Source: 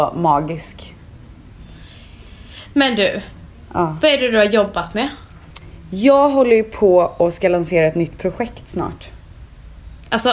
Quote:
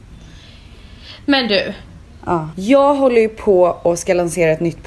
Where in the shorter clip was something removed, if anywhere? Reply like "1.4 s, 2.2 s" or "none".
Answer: 2.5 s